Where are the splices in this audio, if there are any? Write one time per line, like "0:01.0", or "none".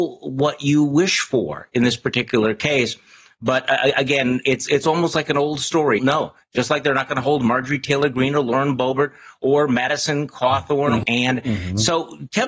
0:06.0
0:11.0